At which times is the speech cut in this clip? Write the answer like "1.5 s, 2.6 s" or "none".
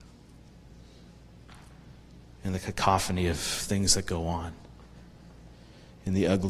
none